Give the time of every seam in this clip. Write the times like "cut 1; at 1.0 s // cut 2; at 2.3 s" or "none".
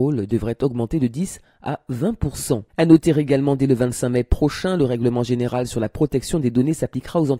cut 1; at 2.7 s

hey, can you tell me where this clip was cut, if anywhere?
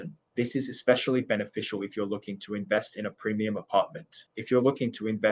cut 1; at 4.3 s

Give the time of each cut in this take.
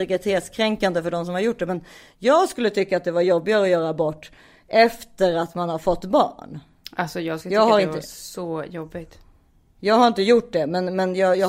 none

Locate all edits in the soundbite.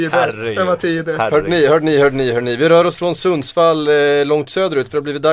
none

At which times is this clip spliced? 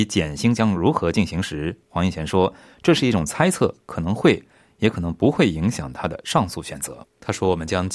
cut 1; at 7.0 s

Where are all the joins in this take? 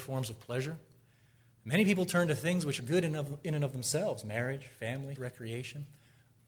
cut 1; at 2.8 s // cut 2; at 5.2 s

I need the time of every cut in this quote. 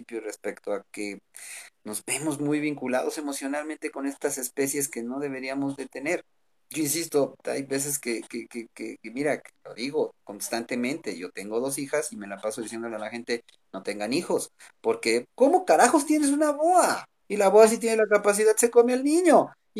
cut 1; at 15.2 s // cut 2; at 17.2 s

